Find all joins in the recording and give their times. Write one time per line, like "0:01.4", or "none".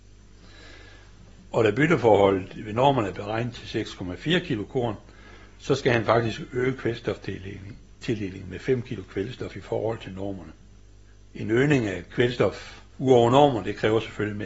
0:12.9